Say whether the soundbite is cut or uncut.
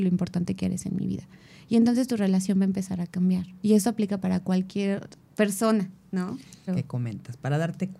cut